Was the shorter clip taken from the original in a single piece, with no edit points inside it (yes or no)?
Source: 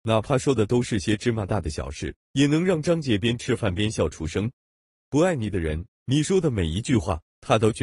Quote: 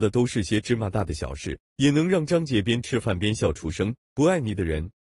no